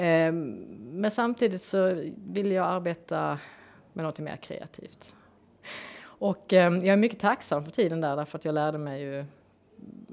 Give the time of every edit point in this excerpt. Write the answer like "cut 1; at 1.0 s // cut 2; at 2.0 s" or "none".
cut 1; at 5.4 s